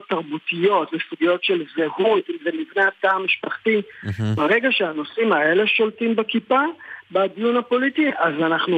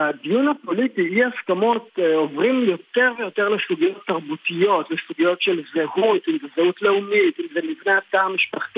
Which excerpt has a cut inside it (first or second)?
first